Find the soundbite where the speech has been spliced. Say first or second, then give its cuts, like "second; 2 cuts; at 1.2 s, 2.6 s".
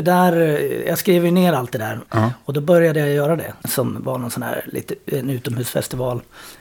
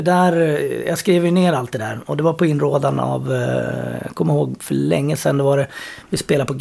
first; 2 cuts; at 2.0 s, 3.6 s